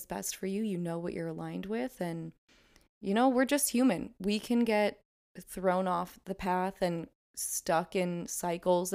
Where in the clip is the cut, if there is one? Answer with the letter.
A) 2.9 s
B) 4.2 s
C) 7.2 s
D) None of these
D